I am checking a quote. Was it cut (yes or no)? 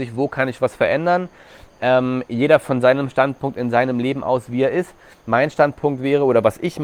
no